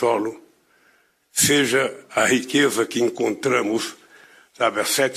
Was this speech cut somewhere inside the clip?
no; 0 cuts

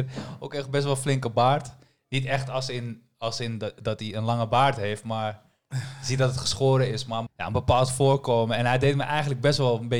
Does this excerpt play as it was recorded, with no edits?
no; 1 cut; at 7.3 s

